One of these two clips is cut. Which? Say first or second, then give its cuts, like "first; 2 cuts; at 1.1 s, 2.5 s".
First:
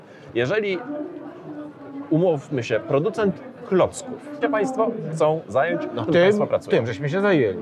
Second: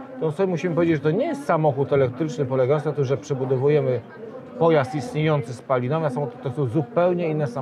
first; 2 cuts; at 4.4 s, 6.1 s